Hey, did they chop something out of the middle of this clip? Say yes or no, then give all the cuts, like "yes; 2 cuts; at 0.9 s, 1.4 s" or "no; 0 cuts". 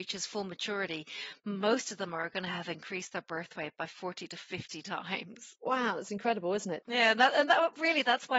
yes; 1 cut; at 5.5 s